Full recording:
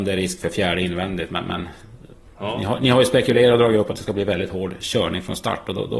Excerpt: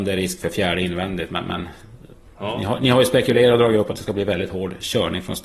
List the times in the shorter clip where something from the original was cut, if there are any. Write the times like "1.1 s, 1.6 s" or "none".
none